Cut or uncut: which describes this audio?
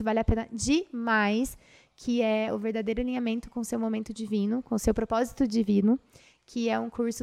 uncut